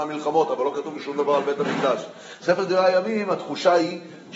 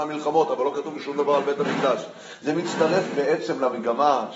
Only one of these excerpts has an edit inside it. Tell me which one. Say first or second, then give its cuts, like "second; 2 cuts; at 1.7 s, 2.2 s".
first; 1 cut; at 2.4 s